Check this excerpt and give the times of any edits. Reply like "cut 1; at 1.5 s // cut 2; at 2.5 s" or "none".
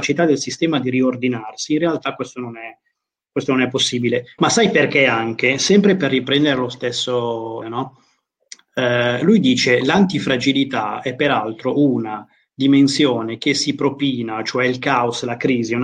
cut 1; at 4.4 s // cut 2; at 7.6 s